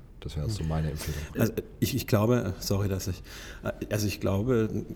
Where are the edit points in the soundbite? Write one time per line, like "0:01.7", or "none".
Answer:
none